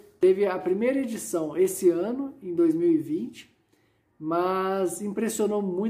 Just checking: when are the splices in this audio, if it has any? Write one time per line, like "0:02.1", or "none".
none